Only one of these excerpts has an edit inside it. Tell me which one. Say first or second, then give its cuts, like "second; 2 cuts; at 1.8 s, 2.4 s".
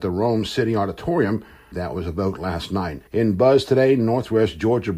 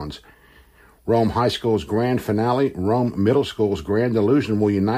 first; 2 cuts; at 1.7 s, 3.1 s